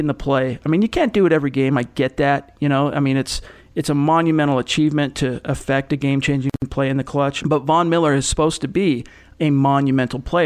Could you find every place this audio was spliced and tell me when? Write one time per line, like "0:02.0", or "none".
0:07.4